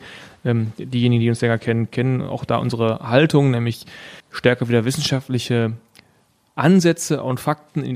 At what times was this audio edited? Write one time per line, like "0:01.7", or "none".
0:04.2